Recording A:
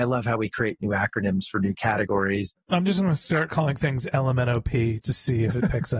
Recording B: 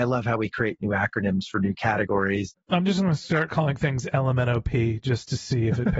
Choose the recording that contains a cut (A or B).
A